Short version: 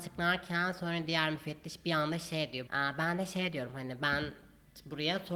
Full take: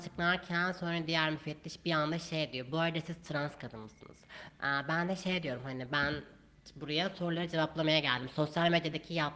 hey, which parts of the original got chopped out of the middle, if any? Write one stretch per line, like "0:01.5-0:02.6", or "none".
0:02.7-0:04.6